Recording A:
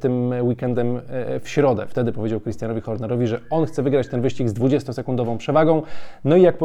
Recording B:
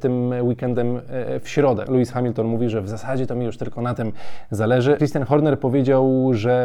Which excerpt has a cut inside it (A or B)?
B